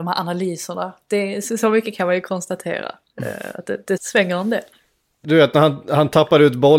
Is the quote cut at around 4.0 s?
yes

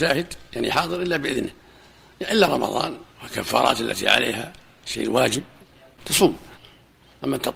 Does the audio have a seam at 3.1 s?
yes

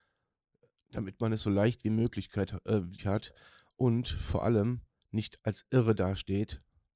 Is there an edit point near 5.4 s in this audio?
yes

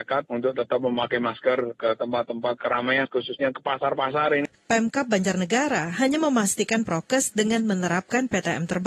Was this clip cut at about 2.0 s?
no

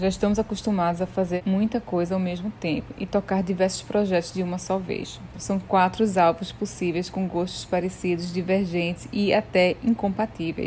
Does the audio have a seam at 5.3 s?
yes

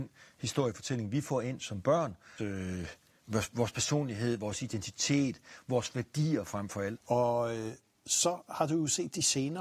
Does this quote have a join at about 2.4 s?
yes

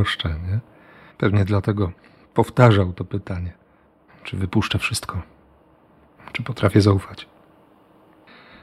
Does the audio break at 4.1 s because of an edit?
yes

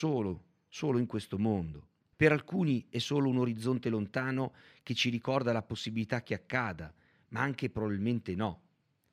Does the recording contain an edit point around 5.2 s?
no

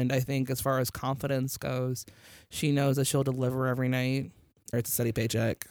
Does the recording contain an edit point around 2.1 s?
no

